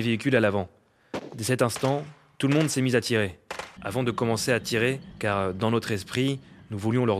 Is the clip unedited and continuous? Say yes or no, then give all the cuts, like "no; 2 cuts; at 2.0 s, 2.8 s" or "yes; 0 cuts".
no; 2 cuts; at 3.8 s, 5.1 s